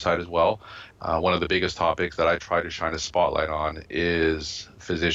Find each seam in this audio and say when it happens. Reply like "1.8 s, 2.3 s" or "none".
0.9 s